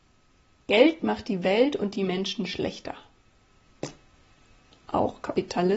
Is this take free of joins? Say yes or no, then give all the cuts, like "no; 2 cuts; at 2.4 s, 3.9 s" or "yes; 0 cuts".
yes; 0 cuts